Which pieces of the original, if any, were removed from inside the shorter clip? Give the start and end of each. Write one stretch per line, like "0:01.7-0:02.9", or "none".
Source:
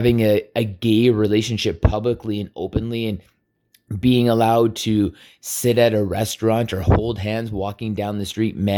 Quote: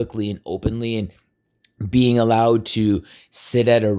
none